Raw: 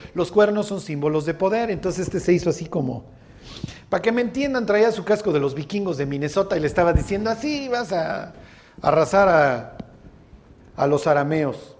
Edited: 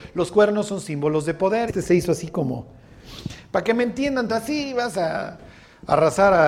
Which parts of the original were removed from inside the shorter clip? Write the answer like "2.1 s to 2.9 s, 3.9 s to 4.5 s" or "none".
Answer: 1.7 s to 2.1 s, 4.7 s to 7.2 s